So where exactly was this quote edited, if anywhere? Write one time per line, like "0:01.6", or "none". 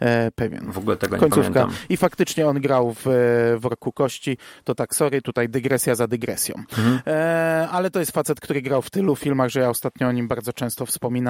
none